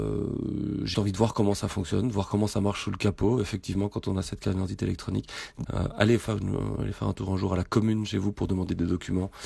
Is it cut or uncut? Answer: cut